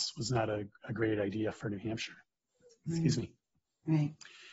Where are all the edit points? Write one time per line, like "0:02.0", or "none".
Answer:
none